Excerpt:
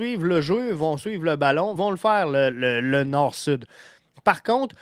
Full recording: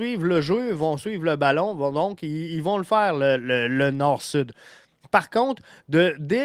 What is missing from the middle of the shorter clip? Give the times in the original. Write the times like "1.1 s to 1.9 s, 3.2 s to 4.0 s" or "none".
1.8 s to 2.6 s